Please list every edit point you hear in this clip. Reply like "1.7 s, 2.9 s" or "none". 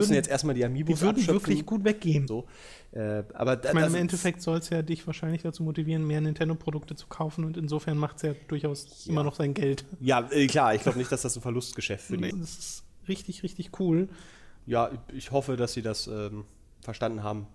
2.3 s, 12.3 s, 14.6 s